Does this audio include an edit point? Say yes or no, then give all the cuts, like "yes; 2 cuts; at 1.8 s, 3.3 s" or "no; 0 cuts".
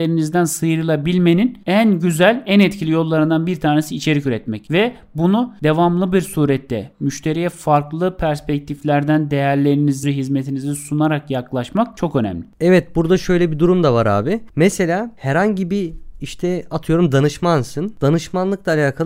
yes; 1 cut; at 10.0 s